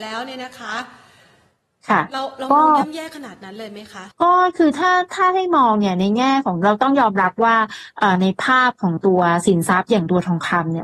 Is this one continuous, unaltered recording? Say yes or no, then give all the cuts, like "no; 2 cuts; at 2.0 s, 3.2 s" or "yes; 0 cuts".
no; 1 cut; at 4.1 s